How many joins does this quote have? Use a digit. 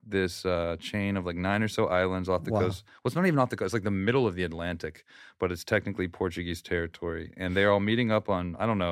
0